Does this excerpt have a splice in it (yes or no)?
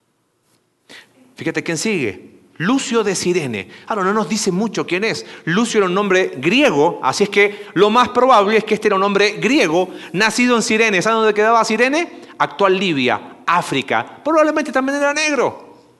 no